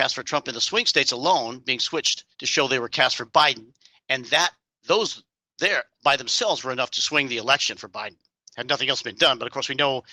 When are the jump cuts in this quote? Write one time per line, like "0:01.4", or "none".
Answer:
0:02.3